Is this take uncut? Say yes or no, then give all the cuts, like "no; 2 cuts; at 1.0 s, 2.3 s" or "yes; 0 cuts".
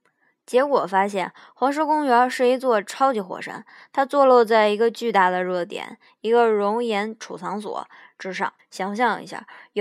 no; 1 cut; at 8.6 s